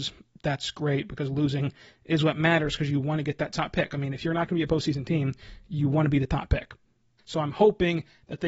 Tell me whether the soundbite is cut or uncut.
cut